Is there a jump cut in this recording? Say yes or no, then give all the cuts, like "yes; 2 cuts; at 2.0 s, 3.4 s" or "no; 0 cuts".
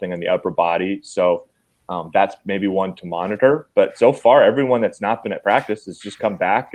no; 0 cuts